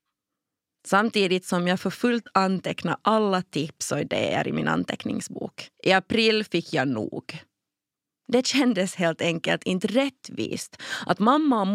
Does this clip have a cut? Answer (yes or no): yes